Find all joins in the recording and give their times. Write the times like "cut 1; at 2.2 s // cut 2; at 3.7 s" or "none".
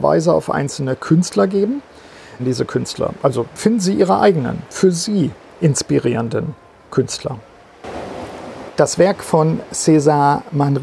cut 1; at 2.4 s // cut 2; at 8.7 s